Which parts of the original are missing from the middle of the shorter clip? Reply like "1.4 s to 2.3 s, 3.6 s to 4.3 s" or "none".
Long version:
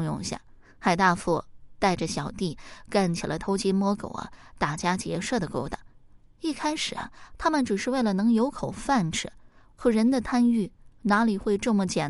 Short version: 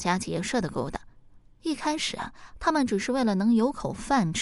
none